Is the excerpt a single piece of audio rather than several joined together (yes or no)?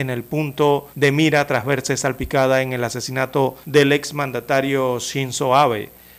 no